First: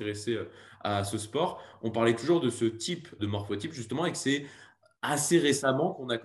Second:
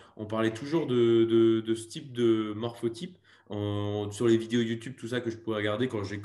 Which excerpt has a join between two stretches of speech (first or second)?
first